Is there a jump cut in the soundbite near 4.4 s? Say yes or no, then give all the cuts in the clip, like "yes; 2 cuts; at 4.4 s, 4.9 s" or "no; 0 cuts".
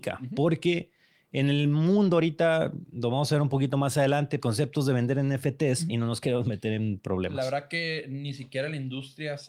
yes; 2 cuts; at 4.4 s, 5.9 s